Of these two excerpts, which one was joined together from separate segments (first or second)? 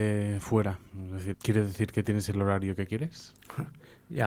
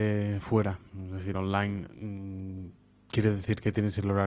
first